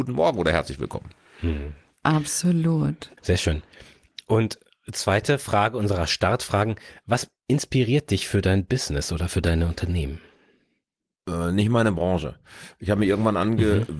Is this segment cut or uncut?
cut